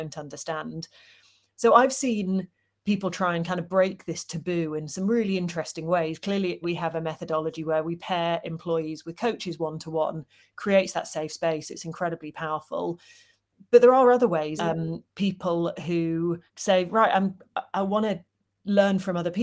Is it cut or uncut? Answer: cut